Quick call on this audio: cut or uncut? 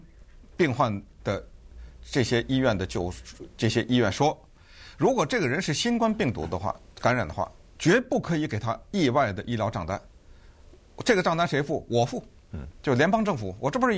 uncut